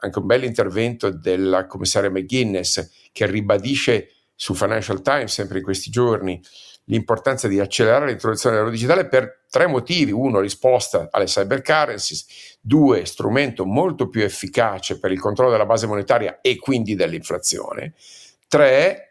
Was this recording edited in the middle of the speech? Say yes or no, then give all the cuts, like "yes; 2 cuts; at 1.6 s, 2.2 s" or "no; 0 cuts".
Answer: no; 0 cuts